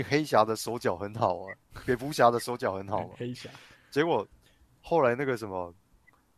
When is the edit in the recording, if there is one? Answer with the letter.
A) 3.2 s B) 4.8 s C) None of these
C